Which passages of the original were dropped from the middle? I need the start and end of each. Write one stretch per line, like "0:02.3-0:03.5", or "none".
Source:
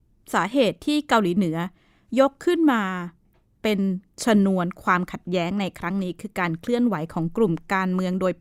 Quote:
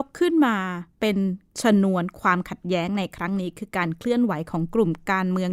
0:03.2-0:03.5